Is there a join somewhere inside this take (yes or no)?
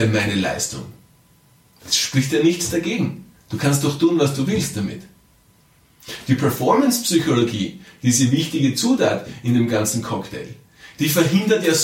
no